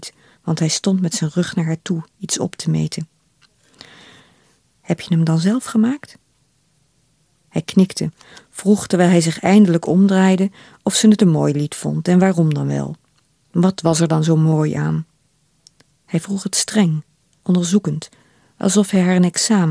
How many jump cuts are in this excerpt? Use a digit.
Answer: 1